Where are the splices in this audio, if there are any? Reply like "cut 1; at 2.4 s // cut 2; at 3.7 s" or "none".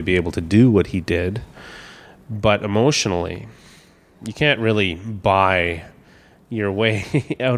none